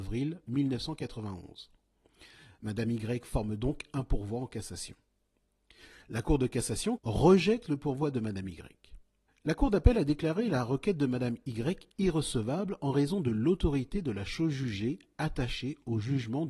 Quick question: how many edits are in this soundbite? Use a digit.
2